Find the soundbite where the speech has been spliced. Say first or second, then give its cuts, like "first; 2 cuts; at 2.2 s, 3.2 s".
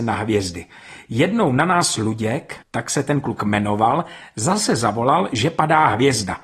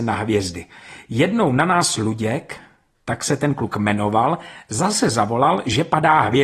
first; 1 cut; at 2.6 s